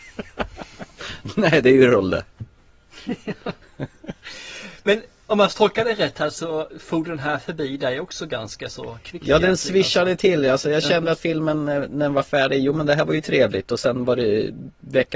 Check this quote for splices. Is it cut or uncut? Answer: uncut